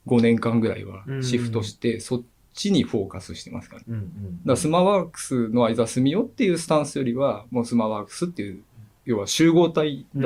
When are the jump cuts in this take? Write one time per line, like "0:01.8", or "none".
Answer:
0:03.8